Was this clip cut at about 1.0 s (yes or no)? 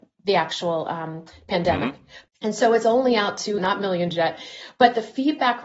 no